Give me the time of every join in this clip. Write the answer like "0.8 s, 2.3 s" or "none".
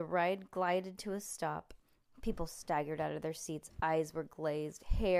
none